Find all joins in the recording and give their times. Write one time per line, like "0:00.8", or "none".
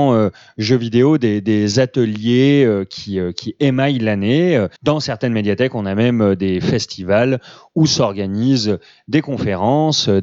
0:04.8

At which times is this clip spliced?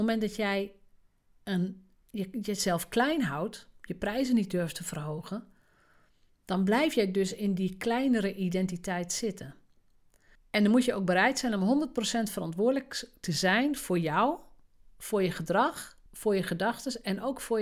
0:10.4
0:16.1

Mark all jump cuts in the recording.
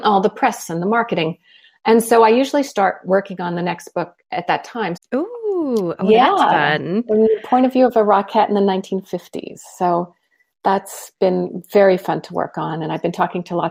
0:05.0

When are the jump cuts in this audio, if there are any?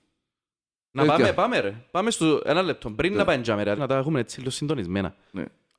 0:03.8

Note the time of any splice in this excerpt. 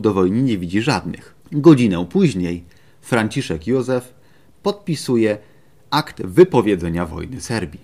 none

